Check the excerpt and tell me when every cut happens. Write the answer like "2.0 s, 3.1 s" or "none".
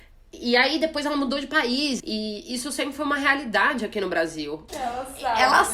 2.0 s, 4.7 s